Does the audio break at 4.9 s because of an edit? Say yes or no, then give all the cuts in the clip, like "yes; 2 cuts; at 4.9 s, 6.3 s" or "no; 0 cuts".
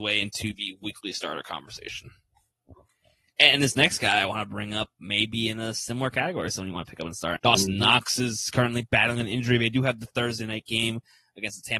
no; 2 cuts; at 3.3 s, 7.4 s